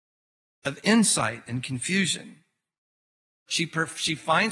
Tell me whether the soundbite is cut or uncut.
cut